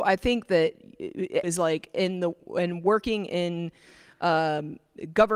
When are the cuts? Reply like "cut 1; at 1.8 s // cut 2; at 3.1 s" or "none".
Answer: cut 1; at 1.4 s